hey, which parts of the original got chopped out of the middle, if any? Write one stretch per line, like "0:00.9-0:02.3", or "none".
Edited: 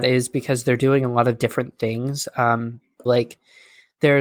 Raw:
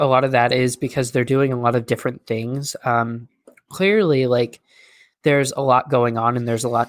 0:03.5-0:04.3